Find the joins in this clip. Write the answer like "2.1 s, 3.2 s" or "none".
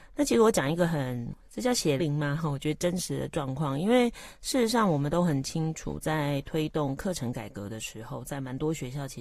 2.0 s